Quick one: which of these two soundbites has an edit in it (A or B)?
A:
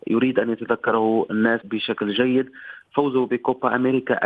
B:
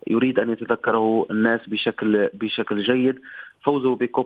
A